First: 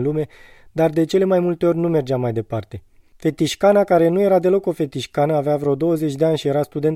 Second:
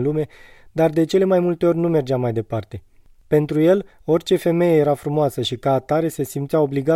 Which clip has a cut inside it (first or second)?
first